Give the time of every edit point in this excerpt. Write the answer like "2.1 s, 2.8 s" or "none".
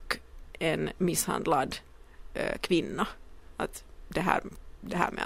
none